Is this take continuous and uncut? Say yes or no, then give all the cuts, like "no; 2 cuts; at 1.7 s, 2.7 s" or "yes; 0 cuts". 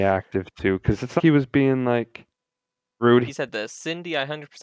no; 2 cuts; at 1.2 s, 3.3 s